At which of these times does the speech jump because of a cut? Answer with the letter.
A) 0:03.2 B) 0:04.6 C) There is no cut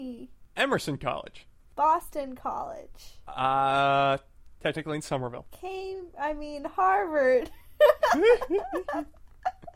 B